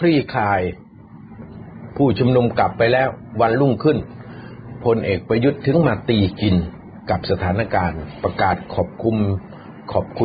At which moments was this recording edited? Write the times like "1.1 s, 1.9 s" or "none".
none